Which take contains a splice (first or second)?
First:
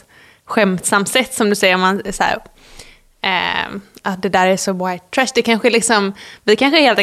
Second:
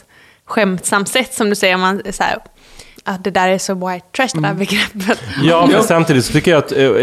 second